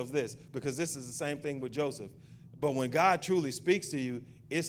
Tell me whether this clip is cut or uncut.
cut